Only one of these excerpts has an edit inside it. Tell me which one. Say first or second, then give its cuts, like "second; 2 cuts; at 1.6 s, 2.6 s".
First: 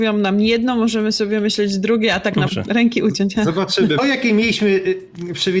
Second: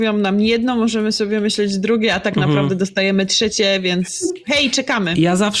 first; 2 cuts; at 2.5 s, 4.0 s